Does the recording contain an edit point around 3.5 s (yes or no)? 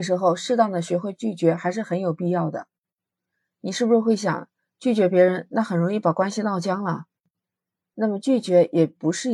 no